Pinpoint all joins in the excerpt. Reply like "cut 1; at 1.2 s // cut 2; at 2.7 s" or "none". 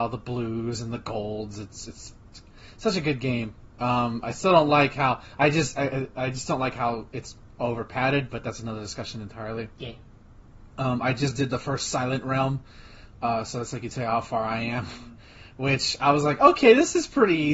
none